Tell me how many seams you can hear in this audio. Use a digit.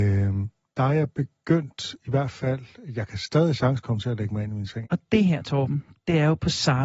1